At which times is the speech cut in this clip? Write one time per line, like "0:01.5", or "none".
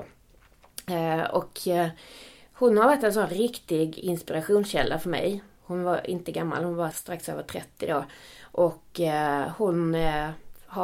0:06.9